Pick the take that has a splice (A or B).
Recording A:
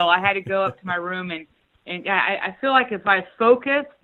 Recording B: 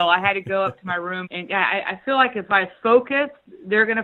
B